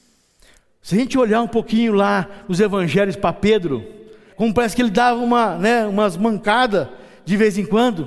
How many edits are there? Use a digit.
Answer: 1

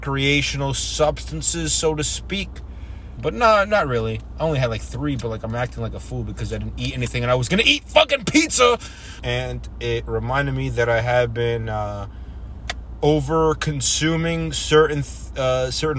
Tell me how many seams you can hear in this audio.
2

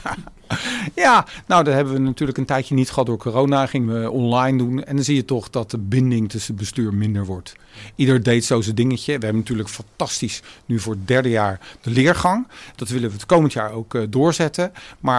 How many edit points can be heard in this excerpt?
0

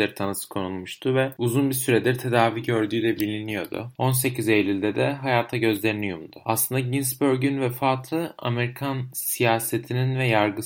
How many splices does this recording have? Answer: 0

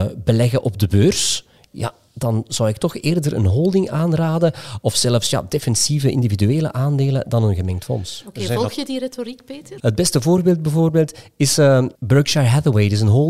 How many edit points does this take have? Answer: 2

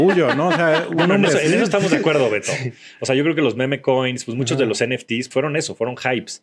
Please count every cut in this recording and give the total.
1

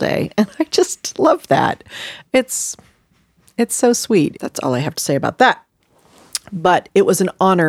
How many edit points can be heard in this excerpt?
1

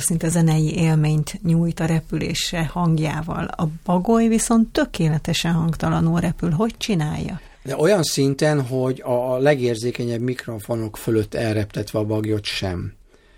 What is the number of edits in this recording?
0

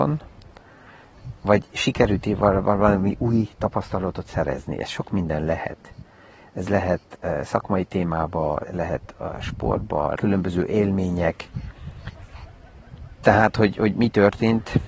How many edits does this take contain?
2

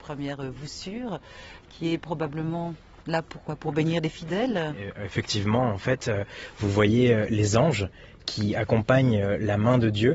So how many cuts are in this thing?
0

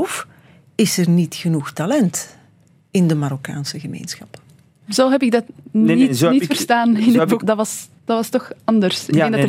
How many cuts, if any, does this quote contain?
2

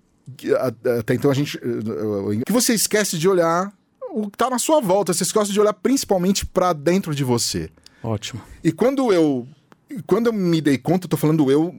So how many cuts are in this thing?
1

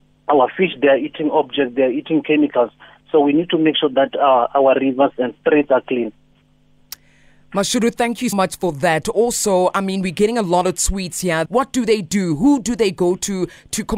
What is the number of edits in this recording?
2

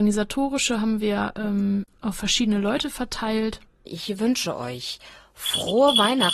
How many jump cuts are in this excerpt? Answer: 1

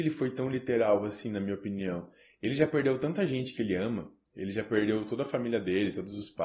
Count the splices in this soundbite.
0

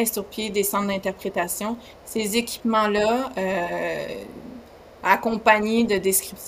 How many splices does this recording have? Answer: 0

